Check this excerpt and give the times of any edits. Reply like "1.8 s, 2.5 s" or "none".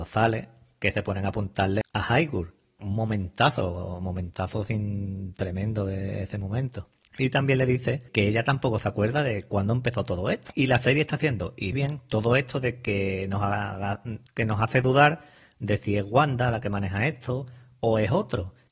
11.7 s